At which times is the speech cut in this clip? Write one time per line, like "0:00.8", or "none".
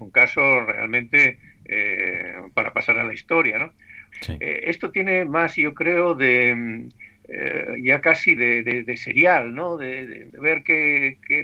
0:04.1
0:08.4
0:10.3

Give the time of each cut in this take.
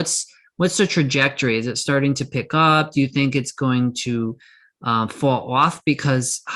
none

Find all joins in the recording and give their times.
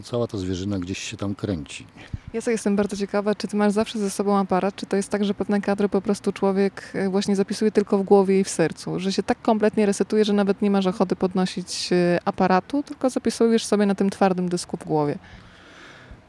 0:03.4

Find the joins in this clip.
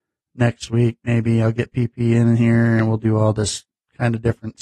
none

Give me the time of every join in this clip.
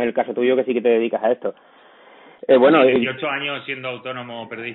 none

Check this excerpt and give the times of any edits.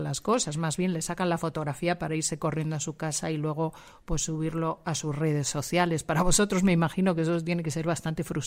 none

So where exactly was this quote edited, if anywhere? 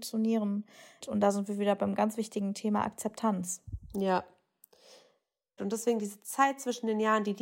0:01.0
0:05.6

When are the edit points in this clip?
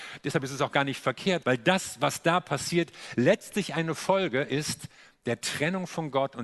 0:01.4

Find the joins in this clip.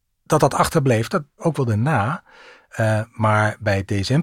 0:01.4

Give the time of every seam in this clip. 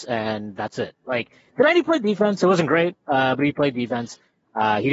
none

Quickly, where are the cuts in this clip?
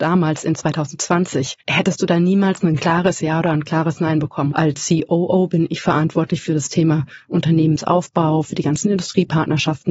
0:01.6
0:04.5

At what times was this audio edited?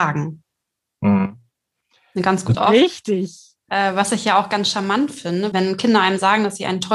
0:02.5
0:05.5

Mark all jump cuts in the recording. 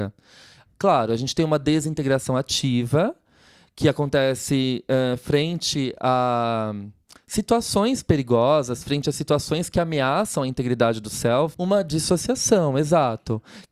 0:11.5

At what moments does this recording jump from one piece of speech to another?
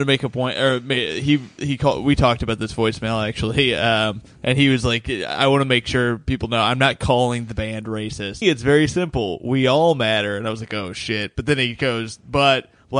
0:08.4

